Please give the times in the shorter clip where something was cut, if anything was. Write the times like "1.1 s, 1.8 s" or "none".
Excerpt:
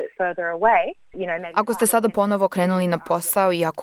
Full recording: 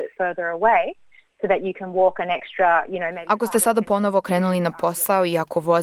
1.1 s